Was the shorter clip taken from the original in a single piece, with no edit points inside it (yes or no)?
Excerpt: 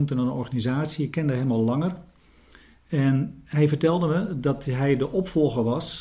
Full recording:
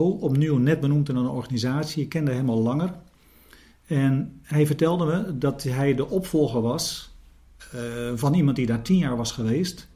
yes